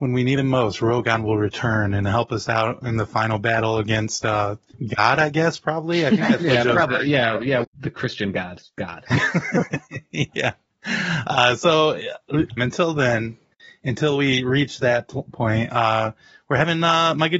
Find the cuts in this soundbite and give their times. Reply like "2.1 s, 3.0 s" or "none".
7.6 s, 12.6 s